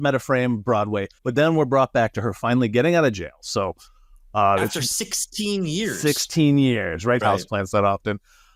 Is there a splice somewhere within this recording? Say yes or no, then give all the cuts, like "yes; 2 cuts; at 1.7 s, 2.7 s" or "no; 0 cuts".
yes; 2 cuts; at 1.2 s, 7.2 s